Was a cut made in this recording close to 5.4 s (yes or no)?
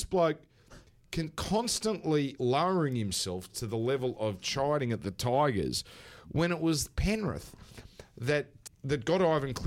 no